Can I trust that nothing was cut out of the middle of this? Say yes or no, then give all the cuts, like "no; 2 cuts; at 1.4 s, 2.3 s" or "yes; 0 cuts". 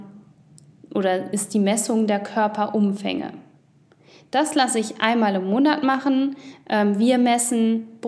yes; 0 cuts